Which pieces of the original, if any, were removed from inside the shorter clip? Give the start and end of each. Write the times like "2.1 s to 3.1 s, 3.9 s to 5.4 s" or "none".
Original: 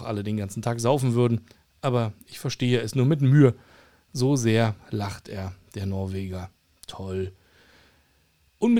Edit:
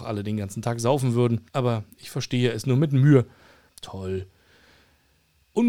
1.5 s to 1.8 s, 4.0 s to 6.7 s